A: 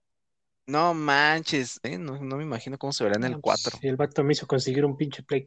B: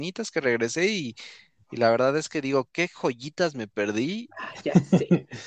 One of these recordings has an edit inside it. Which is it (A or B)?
A